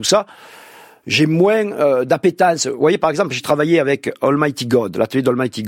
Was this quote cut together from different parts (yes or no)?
no